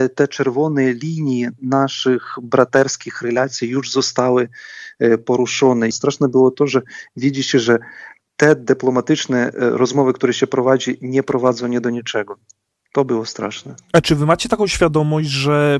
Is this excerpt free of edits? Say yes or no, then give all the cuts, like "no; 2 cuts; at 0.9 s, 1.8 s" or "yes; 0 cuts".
no; 1 cut; at 5.9 s